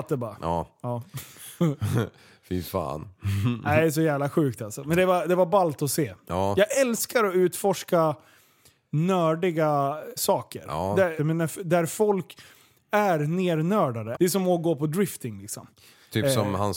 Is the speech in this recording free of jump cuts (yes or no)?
no